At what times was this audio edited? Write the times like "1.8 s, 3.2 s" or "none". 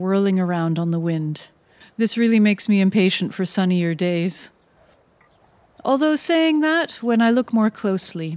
1.8 s